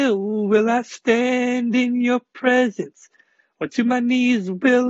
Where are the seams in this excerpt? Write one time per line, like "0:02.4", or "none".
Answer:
none